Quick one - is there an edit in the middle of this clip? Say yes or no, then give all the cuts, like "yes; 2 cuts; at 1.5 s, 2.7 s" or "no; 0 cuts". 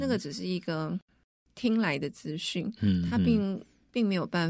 no; 0 cuts